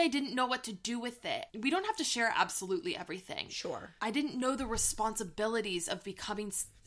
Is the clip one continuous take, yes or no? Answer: no